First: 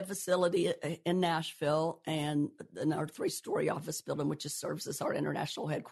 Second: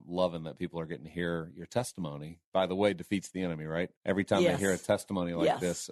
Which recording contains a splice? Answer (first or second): second